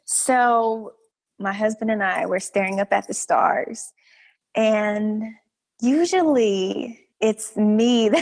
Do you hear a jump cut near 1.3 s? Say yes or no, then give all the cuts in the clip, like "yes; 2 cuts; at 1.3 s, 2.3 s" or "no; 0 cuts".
yes; 1 cut; at 1.3 s